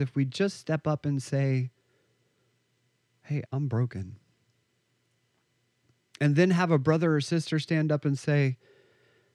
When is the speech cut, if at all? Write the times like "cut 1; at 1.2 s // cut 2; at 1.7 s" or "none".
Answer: cut 1; at 3.4 s